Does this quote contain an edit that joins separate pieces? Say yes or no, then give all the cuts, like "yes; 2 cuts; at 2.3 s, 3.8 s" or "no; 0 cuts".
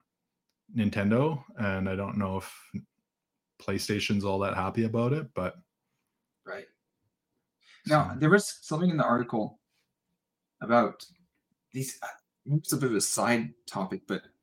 no; 0 cuts